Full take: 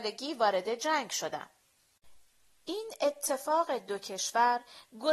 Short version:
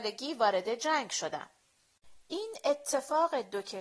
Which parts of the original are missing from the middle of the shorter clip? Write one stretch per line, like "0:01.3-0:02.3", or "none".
0:02.2-0:02.6